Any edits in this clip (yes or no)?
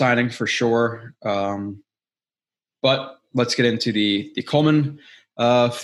no